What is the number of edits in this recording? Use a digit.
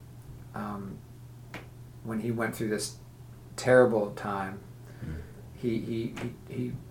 0